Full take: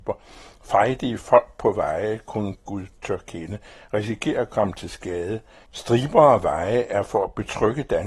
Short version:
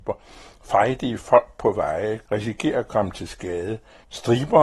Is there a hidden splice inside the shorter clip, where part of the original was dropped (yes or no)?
yes